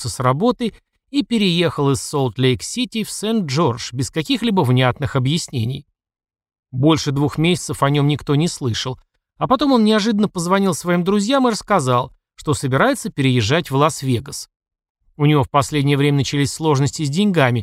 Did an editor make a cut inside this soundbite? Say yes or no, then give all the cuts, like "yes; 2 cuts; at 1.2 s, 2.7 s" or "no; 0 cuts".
no; 0 cuts